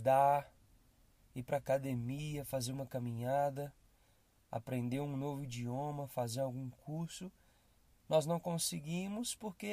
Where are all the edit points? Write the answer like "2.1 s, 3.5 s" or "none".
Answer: none

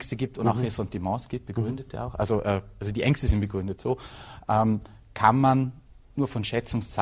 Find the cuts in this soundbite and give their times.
none

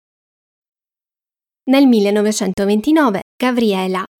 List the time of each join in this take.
none

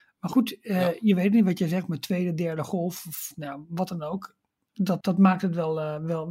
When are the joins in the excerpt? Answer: 5.0 s

